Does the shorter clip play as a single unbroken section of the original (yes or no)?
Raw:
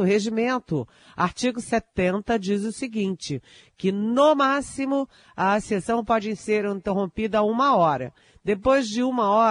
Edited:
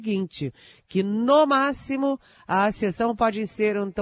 yes